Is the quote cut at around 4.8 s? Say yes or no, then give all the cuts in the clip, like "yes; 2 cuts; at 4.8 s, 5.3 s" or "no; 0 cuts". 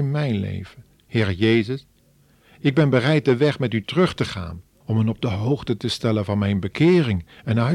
yes; 2 cuts; at 1.0 s, 4.8 s